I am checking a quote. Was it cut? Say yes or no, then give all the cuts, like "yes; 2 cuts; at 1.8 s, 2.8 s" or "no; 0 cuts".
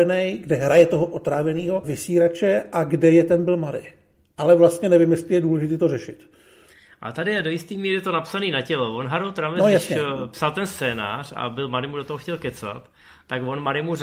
yes; 1 cut; at 1.8 s